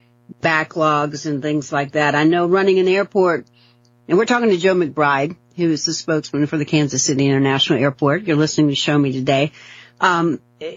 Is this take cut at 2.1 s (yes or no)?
no